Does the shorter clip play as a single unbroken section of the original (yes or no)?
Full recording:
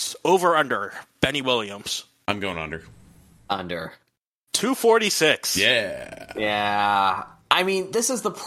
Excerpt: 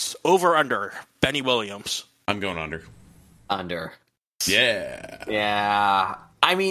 no